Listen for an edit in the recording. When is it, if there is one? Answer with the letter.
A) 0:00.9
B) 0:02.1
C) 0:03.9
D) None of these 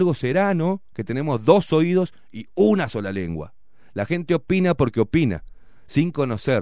D